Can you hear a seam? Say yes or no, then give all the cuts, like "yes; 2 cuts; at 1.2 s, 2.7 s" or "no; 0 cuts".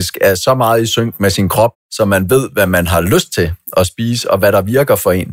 yes; 1 cut; at 1.7 s